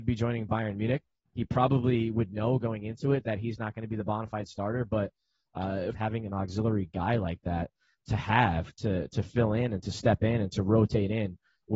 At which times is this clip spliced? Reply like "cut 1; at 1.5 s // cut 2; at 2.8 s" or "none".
cut 1; at 5.9 s